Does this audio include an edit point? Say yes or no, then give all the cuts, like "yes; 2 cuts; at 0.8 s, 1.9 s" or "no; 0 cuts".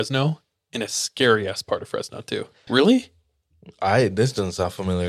yes; 1 cut; at 2.7 s